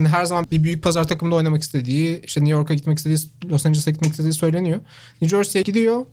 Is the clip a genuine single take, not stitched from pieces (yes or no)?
yes